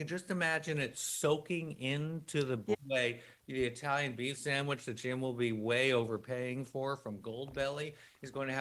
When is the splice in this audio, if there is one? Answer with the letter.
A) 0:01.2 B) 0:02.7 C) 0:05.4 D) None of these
B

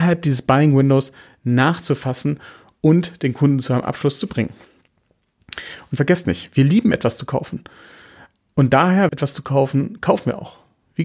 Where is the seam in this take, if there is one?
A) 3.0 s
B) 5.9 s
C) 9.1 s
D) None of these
C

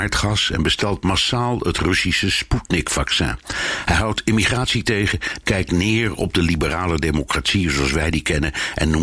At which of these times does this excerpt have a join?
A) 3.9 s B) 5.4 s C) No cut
B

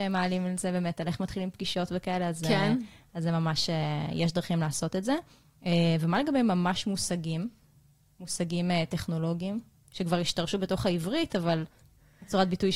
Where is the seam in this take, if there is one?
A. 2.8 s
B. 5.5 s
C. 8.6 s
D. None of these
D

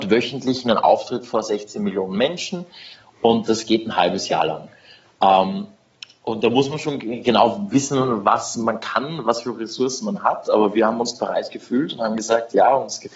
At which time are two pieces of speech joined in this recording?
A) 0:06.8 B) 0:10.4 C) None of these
C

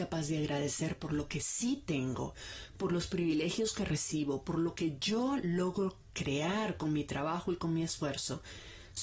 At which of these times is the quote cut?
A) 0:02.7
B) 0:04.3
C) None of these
A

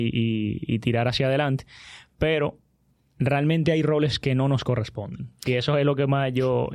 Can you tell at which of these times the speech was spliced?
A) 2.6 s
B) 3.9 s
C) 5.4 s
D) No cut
D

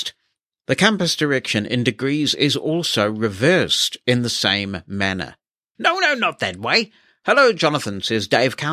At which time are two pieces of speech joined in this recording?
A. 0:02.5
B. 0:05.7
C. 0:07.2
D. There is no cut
B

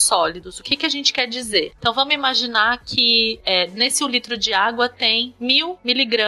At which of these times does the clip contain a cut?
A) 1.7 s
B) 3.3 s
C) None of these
A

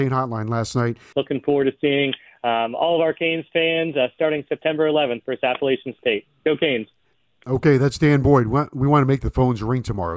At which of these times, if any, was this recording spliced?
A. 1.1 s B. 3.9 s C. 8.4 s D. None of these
A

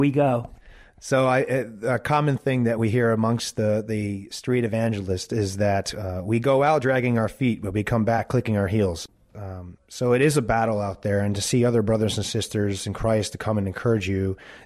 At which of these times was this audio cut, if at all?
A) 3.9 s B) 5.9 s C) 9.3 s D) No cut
C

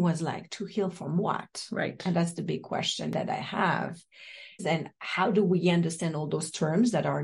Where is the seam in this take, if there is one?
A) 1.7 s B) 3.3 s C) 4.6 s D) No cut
C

